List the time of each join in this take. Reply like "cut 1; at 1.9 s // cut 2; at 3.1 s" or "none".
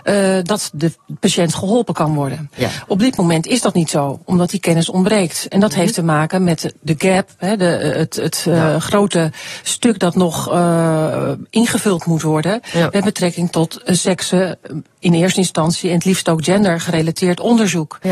none

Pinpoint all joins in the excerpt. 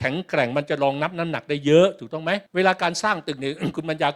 cut 1; at 2.5 s

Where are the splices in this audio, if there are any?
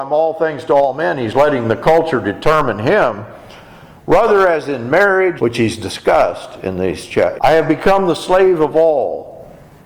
cut 1; at 5.4 s // cut 2; at 7.4 s

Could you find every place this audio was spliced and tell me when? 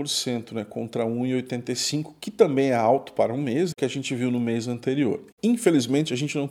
cut 1; at 3.7 s

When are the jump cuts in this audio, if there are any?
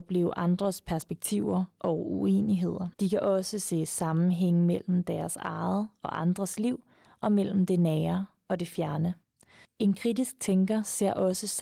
cut 1; at 2.9 s // cut 2; at 9.7 s

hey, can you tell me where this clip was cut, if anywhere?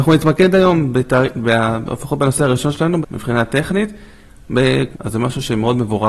cut 1; at 3.0 s // cut 2; at 4.9 s

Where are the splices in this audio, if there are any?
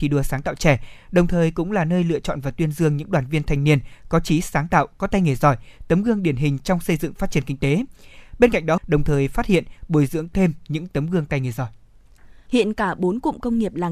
cut 1; at 8.8 s // cut 2; at 12.5 s

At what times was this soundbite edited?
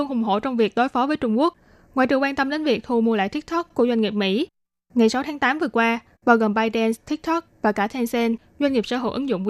cut 1; at 6.1 s

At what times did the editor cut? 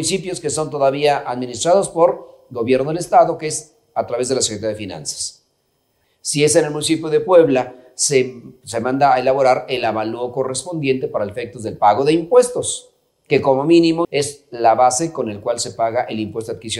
cut 1; at 6.0 s // cut 2; at 14.0 s

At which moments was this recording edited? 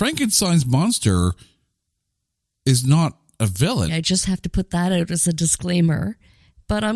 cut 1; at 3.9 s

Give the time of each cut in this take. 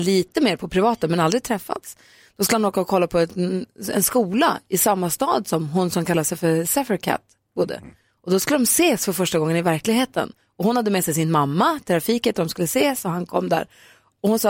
none

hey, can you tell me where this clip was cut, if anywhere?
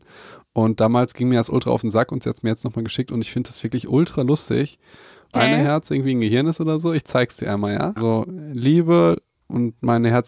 cut 1; at 5.3 s // cut 2; at 8.0 s

